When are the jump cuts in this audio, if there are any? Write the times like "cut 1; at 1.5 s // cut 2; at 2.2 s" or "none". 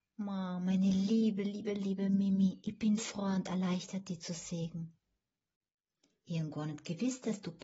cut 1; at 3.0 s

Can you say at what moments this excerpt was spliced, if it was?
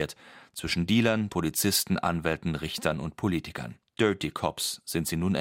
cut 1; at 1.3 s // cut 2; at 3.9 s

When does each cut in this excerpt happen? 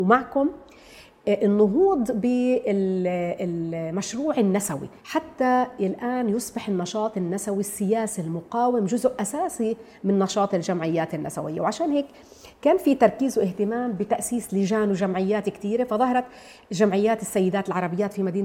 cut 1; at 5.0 s

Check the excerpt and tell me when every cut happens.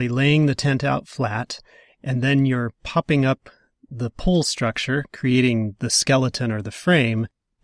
none

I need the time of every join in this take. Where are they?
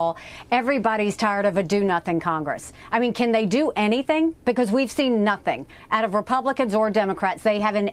none

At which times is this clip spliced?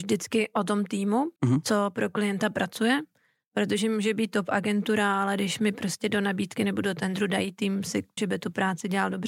cut 1; at 1.4 s // cut 2; at 8.2 s

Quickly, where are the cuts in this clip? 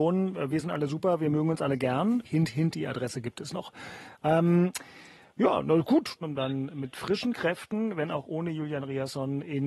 cut 1; at 2.2 s // cut 2; at 6.2 s

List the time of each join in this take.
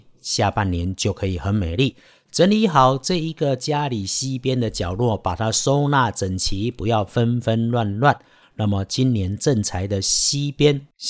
cut 1; at 8.4 s

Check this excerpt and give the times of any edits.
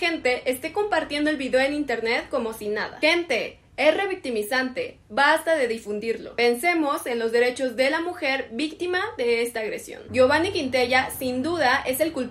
none

